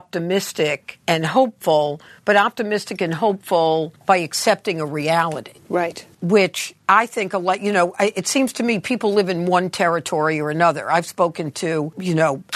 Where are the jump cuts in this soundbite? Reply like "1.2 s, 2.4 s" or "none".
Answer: none